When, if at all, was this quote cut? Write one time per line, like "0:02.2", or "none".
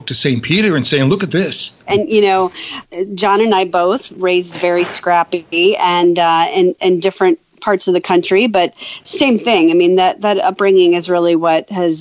0:01.9